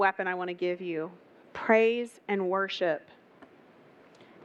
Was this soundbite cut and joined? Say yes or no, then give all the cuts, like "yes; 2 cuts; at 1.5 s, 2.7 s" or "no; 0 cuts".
no; 0 cuts